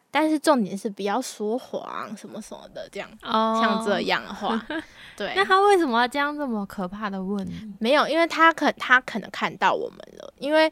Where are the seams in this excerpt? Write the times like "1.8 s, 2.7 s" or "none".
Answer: none